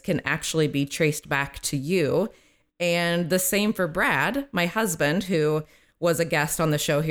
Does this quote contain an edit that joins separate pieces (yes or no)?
no